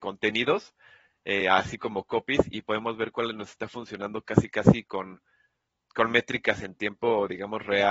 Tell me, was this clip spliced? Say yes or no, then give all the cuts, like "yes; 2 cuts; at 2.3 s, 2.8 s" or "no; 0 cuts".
no; 0 cuts